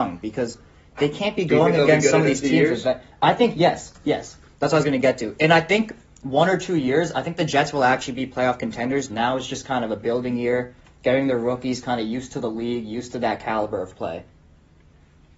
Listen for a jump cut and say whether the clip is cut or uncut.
cut